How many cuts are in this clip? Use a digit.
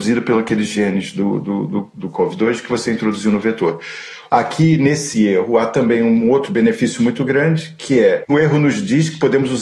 2